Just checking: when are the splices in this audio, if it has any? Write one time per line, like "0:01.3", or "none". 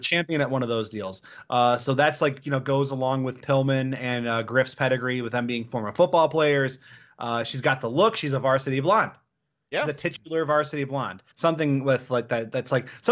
0:11.3